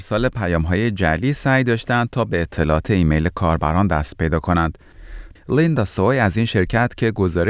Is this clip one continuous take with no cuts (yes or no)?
no